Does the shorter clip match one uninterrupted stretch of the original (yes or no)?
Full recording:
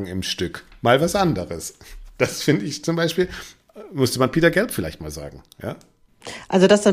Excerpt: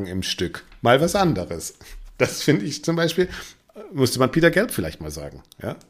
yes